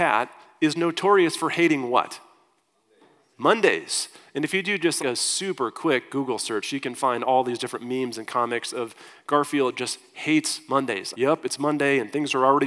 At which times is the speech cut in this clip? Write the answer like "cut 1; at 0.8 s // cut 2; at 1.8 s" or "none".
cut 1; at 5.0 s // cut 2; at 11.1 s